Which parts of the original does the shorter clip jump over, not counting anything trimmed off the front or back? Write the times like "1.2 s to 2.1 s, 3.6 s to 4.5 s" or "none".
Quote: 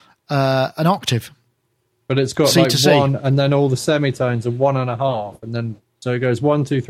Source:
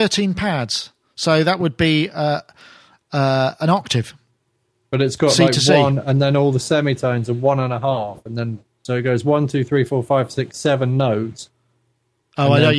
none